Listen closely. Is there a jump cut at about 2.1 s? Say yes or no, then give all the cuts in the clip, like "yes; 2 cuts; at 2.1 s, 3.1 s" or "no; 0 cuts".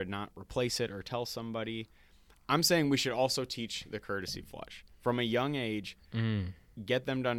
no; 0 cuts